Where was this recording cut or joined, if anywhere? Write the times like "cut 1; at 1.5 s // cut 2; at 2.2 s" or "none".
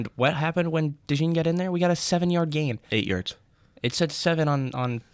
none